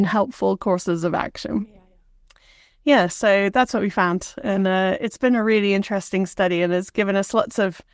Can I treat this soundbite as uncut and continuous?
yes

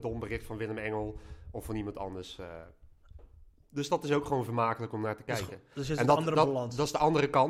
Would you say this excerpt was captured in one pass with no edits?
yes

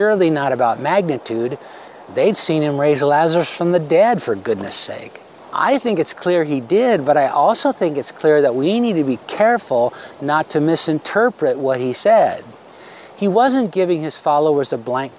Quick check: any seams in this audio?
yes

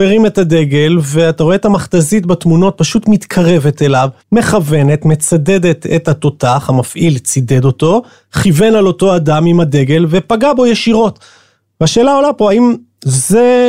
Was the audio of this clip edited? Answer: yes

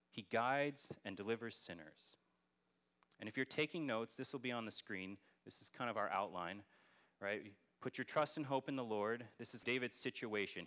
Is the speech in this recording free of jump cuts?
no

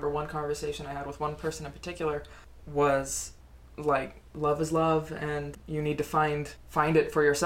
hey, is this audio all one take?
yes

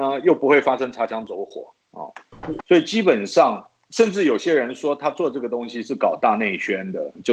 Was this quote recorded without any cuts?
no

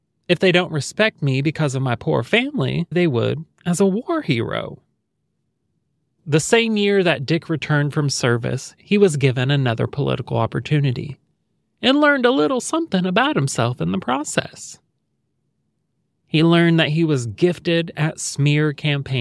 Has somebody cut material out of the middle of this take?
yes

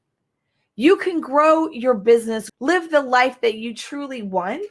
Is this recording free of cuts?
no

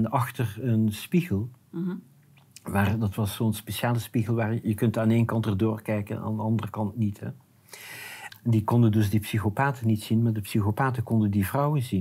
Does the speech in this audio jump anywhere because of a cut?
yes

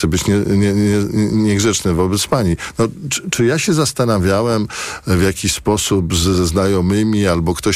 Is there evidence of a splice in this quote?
no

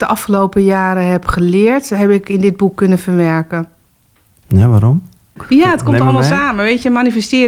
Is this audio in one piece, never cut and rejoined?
yes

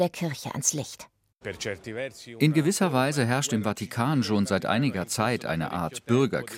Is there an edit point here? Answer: no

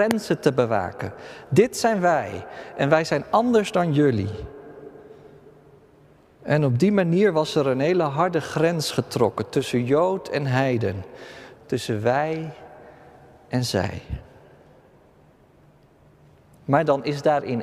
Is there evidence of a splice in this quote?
yes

